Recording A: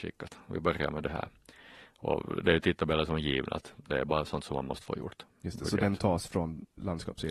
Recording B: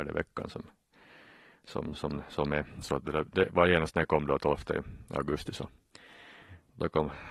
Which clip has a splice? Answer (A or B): A